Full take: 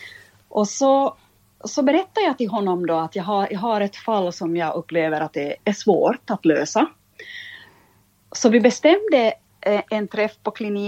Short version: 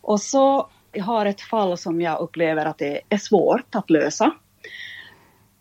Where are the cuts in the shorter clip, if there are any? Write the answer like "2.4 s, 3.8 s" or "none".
0.9 s